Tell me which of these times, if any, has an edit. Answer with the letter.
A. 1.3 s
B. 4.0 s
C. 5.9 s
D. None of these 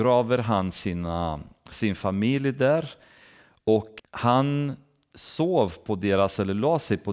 B